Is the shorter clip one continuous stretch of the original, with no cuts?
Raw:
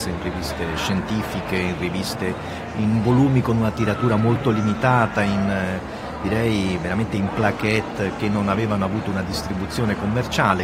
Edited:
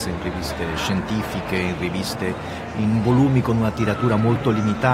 yes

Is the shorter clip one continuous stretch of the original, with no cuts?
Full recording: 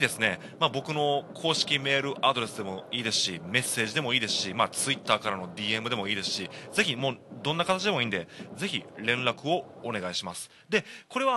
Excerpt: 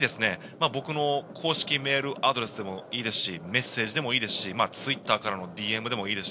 yes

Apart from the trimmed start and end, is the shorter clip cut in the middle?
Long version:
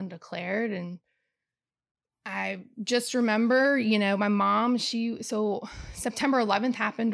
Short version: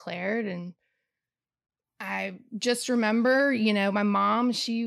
no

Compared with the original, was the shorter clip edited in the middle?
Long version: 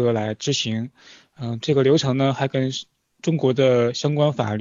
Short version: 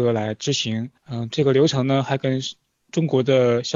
yes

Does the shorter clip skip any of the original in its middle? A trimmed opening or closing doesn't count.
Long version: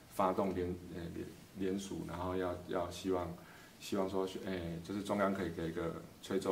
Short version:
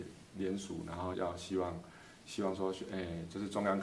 yes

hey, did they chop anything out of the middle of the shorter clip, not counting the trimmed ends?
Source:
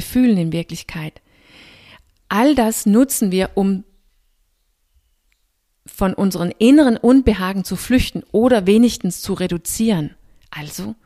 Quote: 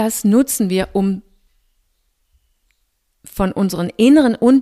no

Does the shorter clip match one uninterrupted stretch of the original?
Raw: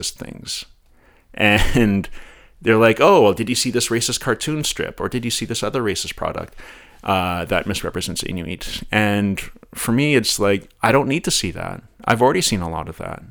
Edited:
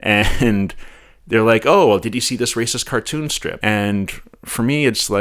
no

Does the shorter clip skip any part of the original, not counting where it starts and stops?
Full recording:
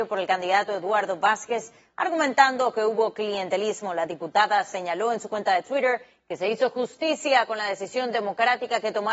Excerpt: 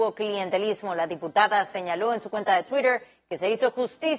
no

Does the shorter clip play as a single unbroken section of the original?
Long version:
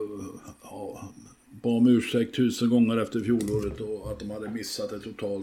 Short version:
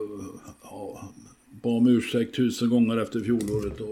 yes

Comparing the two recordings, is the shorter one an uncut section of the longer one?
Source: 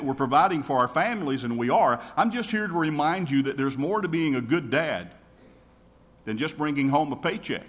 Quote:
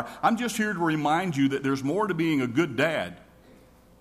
yes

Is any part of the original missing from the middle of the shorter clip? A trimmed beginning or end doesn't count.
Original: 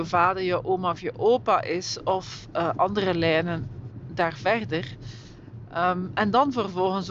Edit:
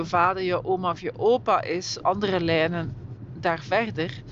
yes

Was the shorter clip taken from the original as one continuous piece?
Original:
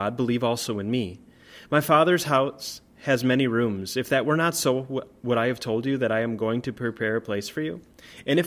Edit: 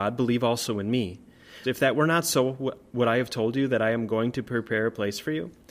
no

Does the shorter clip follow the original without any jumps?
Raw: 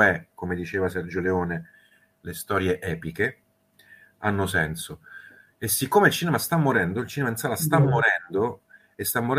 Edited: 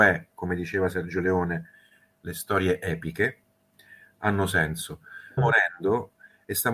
no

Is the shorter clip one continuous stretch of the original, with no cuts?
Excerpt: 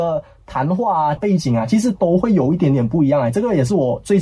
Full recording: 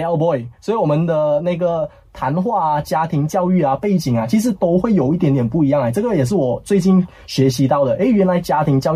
no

